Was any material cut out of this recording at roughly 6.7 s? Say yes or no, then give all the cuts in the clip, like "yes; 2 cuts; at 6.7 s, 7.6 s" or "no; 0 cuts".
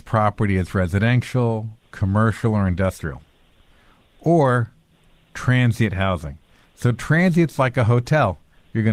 no; 0 cuts